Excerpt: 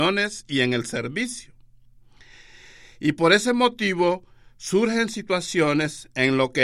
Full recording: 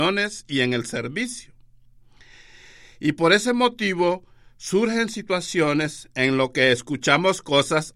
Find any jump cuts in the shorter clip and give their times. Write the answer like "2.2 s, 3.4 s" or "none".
none